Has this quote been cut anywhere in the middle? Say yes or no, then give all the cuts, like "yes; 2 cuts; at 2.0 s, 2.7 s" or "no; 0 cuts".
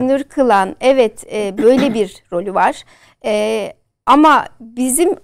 yes; 1 cut; at 3.1 s